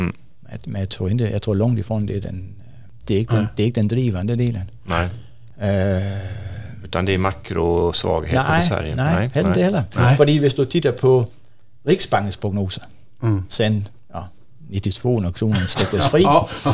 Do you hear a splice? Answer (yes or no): no